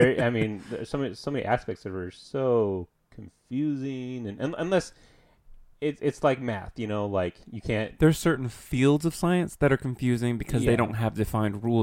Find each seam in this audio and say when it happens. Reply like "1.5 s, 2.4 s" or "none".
none